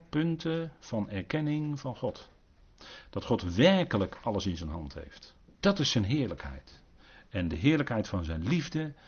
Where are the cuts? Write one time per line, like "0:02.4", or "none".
0:05.5